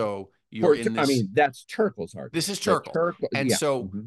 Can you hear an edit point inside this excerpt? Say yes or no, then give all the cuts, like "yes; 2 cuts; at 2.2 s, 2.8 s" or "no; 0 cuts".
no; 0 cuts